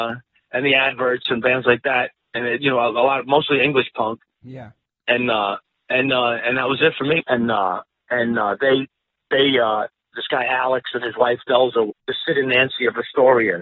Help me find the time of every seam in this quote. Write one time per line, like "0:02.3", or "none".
0:07.2
0:11.9